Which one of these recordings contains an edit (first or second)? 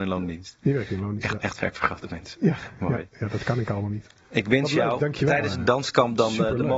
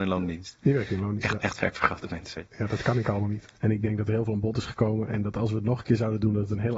second